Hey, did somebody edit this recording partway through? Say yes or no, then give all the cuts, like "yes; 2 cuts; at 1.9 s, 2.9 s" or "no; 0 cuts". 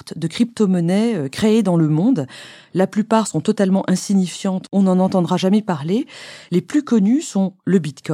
no; 0 cuts